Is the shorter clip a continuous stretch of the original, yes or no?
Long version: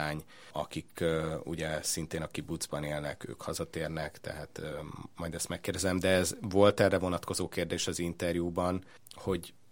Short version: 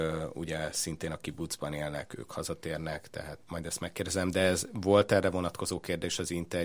no